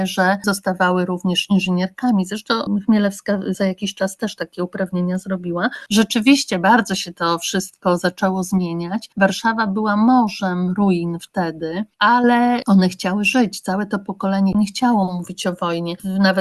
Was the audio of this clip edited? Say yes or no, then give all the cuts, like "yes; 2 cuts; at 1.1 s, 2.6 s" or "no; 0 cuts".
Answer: no; 0 cuts